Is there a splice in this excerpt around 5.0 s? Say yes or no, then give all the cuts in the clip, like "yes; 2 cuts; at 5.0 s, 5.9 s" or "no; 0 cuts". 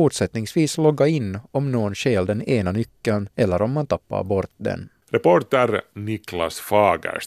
yes; 2 cuts; at 3.3 s, 5.0 s